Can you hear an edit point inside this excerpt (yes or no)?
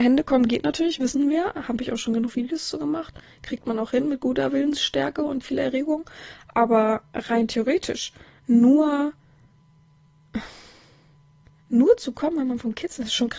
no